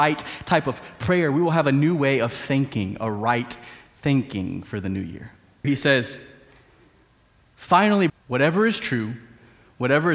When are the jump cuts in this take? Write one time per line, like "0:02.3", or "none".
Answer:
0:05.6
0:08.1